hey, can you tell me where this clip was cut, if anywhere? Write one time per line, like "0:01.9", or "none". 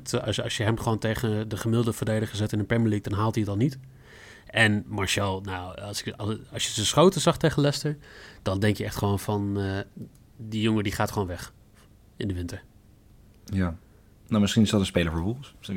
none